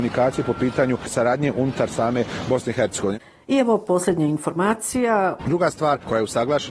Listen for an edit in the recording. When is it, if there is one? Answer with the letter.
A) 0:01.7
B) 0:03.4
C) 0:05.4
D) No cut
C